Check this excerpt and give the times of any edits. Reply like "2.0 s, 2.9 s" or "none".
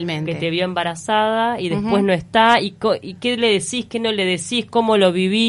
none